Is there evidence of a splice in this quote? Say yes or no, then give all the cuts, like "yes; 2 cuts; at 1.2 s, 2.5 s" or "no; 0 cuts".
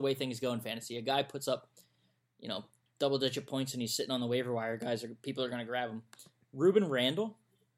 no; 0 cuts